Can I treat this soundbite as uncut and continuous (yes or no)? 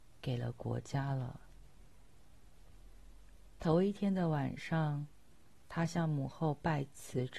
yes